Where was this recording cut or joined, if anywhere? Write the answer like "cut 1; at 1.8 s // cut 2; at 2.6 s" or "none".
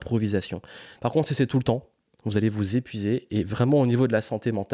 cut 1; at 1.0 s